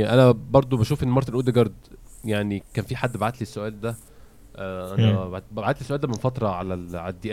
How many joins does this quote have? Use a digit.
0